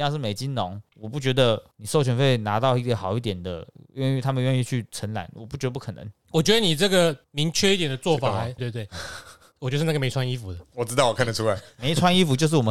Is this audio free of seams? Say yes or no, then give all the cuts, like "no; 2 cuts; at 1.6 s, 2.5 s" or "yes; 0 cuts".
no; 1 cut; at 8.6 s